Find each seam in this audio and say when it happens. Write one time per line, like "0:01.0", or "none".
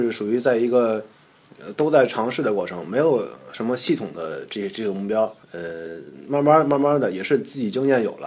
0:05.4

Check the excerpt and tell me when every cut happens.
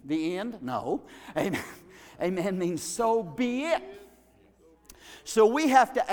none

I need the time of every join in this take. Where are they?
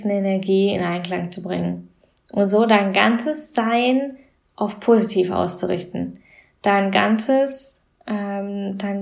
none

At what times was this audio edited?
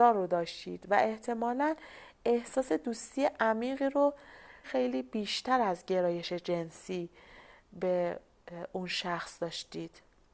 0:04.6

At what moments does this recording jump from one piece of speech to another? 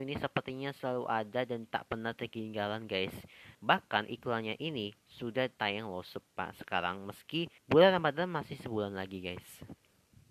0:03.5
0:07.6

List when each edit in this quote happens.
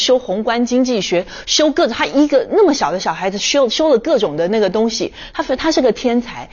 none

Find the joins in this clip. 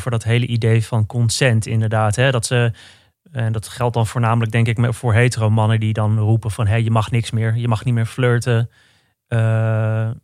none

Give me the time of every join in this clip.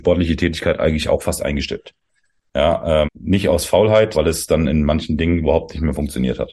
0:03.0
0:04.1

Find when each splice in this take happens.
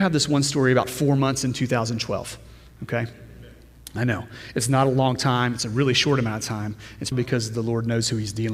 0:07.1

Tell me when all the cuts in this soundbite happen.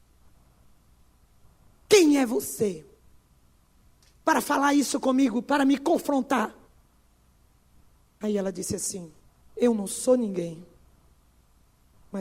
none

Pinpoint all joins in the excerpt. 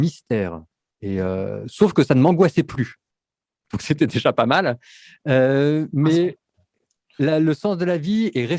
none

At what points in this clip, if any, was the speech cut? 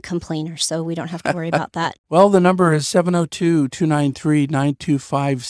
0:02.0

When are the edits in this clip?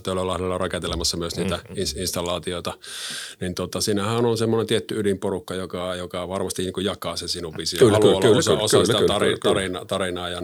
none

